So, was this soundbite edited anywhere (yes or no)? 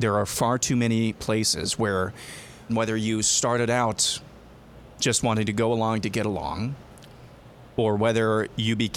yes